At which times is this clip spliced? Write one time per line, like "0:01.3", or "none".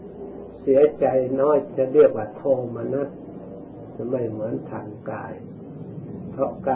0:01.7